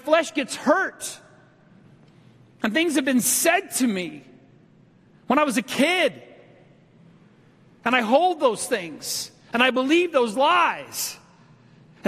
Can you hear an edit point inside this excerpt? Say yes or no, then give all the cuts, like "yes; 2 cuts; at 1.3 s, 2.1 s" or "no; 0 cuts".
no; 0 cuts